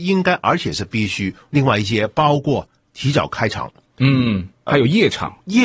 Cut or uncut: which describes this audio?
cut